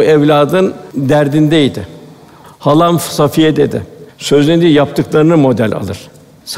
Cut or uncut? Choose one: cut